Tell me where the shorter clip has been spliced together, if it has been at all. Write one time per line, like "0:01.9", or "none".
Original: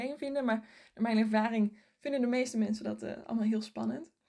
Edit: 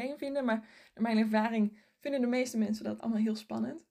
0:03.0